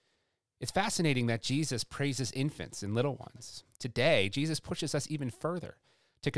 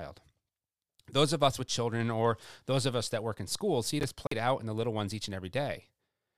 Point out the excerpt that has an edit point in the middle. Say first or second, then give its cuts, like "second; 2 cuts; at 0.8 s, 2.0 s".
first; 1 cut; at 3.8 s